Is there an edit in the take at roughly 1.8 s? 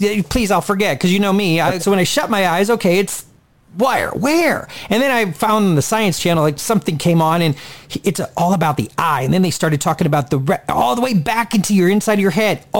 yes; 1 cut; at 1.8 s

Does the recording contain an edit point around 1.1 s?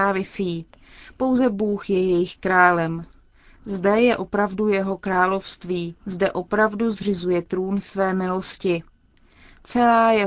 no; 1 cut; at 6.0 s

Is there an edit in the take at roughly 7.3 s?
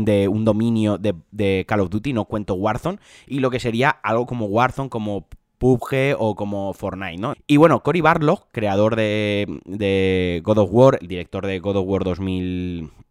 yes; 1 cut; at 7.3 s

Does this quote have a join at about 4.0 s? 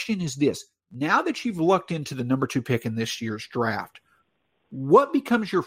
no; 0 cuts

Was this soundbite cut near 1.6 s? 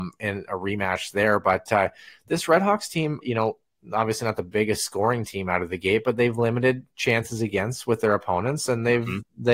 no; 1 cut; at 3.2 s

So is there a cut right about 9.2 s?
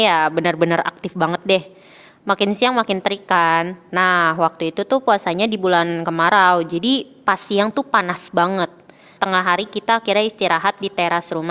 yes; 2 cuts; at 3.9 s, 9.2 s

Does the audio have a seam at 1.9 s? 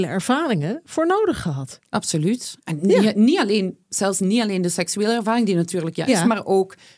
no; 1 cut; at 6.1 s

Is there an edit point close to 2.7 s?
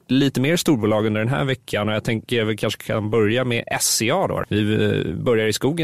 no; 1 cut; at 4.4 s

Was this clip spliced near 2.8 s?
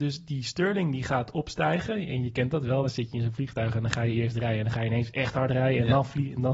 no; 0 cuts

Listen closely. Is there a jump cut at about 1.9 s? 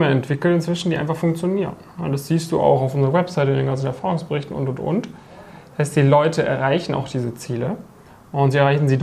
no; 0 cuts

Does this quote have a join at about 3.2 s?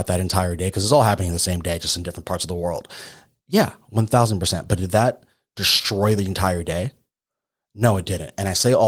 no; 0 cuts

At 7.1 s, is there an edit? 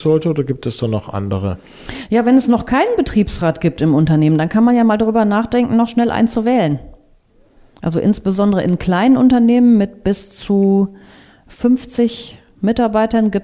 no; 0 cuts

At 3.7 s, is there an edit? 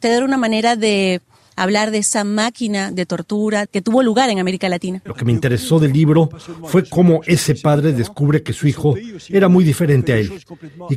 yes; 2 cuts; at 3.7 s, 5.1 s

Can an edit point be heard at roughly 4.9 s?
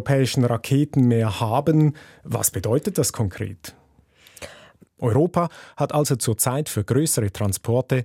yes; 1 cut; at 4.9 s

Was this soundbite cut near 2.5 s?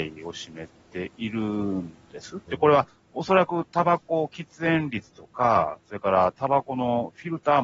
yes; 1 cut; at 2.5 s

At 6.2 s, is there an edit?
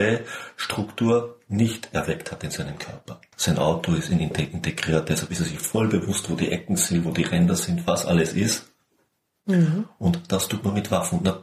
no; 1 cut; at 3.3 s

